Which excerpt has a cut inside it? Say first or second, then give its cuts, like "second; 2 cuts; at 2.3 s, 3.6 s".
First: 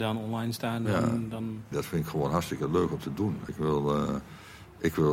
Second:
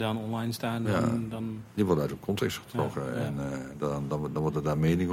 first; 2 cuts; at 1.7 s, 3.5 s